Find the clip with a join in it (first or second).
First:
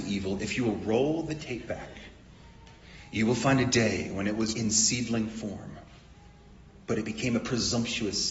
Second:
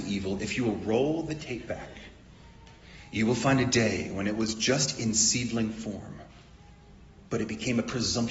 first